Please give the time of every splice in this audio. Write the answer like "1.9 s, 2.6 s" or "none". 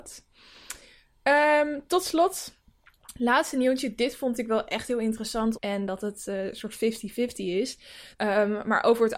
5.5 s, 8.1 s